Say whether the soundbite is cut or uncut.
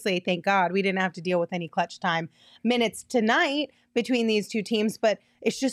uncut